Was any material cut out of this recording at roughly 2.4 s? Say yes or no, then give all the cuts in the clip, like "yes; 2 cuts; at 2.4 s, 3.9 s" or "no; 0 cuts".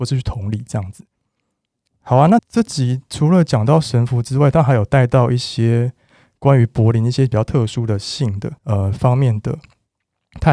yes; 2 cuts; at 2.4 s, 8.6 s